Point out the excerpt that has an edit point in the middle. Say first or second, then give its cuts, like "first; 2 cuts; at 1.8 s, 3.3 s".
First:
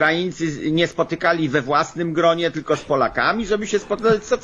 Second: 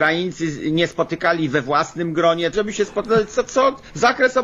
second; 1 cut; at 2.5 s